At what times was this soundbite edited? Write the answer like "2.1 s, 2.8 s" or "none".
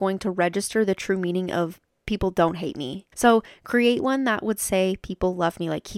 3.1 s